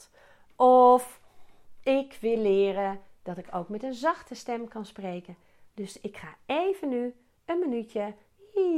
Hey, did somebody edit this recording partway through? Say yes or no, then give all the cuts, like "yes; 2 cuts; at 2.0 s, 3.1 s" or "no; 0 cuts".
no; 0 cuts